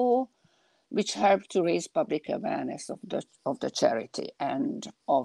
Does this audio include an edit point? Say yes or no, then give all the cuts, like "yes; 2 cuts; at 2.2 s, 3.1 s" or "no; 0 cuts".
no; 0 cuts